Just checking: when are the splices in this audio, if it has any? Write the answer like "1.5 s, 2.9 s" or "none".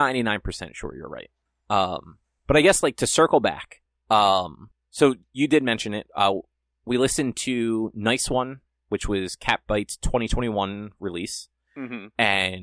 none